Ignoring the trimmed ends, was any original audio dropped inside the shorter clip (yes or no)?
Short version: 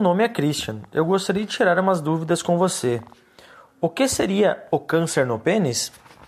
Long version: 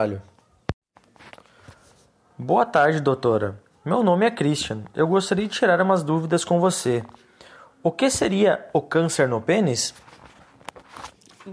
no